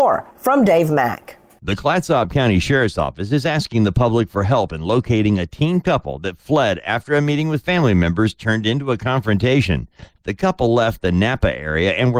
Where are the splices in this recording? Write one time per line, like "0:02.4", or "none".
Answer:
none